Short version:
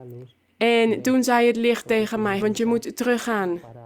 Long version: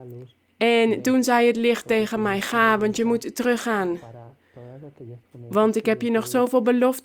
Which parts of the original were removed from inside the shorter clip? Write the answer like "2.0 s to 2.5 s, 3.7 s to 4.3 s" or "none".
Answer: 2.4 s to 2.8 s